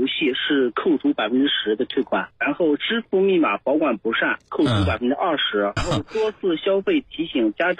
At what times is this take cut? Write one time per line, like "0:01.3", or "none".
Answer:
0:02.3
0:05.8